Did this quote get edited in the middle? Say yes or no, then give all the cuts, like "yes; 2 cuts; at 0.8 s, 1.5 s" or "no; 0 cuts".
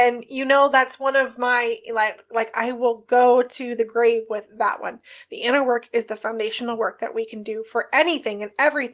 no; 0 cuts